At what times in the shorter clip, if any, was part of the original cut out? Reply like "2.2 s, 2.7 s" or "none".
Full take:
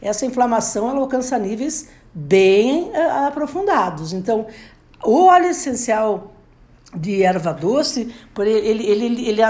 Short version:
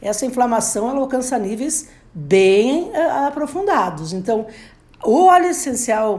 none